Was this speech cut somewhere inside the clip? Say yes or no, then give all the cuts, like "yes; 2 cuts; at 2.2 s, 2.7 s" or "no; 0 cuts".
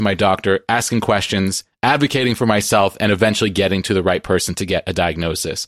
no; 0 cuts